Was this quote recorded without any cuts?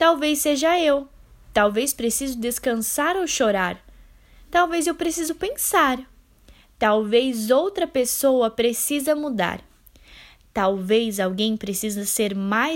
yes; 0 cuts

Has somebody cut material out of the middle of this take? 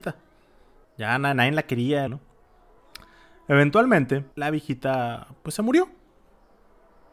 yes; 2 cuts; at 2.1 s, 4.3 s

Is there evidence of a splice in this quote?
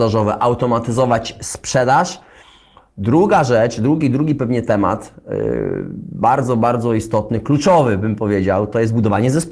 no; 0 cuts

